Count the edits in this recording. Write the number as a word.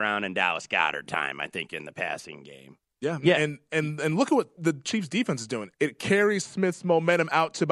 two